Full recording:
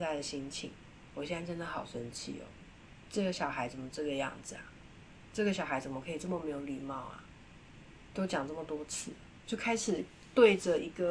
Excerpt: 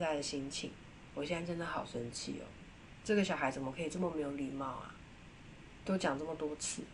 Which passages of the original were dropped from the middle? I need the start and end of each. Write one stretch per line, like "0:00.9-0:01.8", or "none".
0:03.0-0:05.3